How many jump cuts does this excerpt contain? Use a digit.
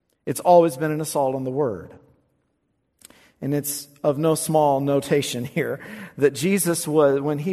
0